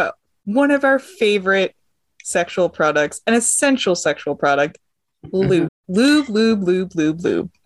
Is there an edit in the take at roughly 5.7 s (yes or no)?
yes